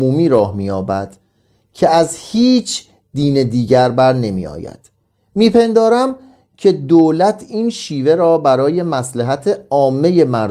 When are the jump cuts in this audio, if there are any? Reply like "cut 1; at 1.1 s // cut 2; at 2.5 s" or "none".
none